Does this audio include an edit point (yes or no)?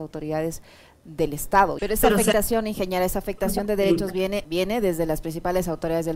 yes